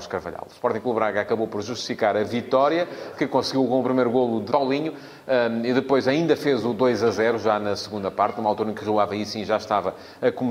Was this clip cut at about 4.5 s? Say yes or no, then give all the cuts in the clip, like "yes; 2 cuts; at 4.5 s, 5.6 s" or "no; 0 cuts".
yes; 1 cut; at 4.5 s